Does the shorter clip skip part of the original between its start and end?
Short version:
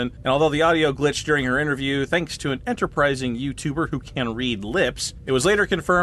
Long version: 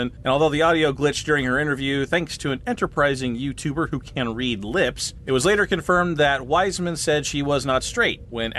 no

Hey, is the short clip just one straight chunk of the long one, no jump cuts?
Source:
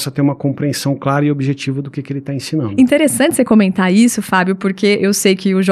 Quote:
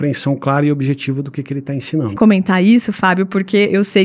no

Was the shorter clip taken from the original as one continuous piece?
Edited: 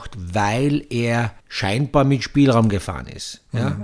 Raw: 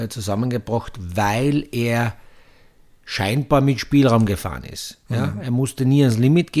no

